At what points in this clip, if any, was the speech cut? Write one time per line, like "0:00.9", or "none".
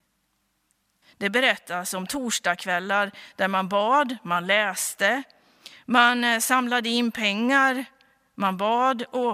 0:01.0